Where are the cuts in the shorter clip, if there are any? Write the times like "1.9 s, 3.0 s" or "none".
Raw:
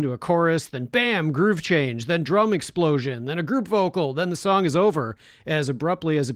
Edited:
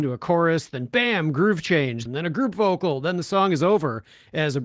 2.1 s